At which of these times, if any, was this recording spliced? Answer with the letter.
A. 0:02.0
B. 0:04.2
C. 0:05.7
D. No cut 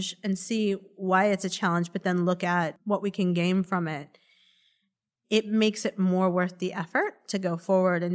D